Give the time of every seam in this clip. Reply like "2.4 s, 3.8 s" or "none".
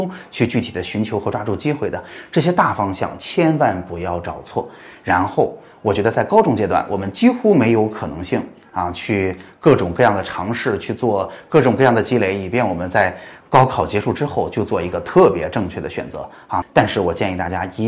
16.6 s

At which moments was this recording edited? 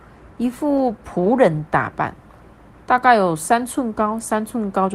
none

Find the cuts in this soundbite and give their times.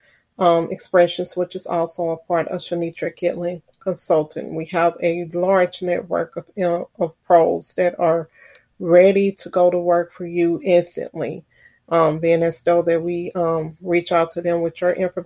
none

